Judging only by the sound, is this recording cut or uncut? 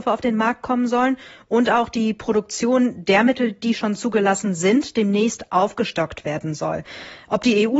uncut